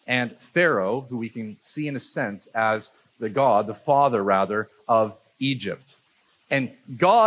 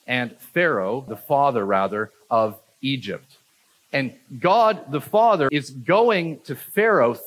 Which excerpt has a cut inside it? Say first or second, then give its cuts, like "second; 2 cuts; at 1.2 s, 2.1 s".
second; 2 cuts; at 1.1 s, 5.5 s